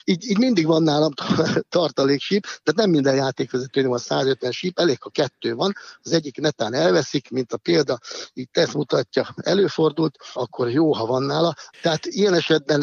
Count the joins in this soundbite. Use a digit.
2